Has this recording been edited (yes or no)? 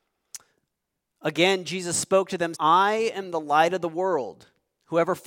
yes